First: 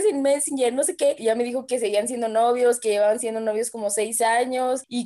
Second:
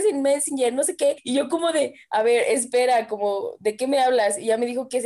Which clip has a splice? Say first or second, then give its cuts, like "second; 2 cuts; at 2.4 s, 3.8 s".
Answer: first; 1 cut; at 1.2 s